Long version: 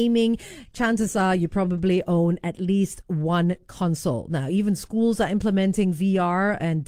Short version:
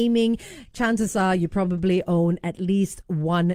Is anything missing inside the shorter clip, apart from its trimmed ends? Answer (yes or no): no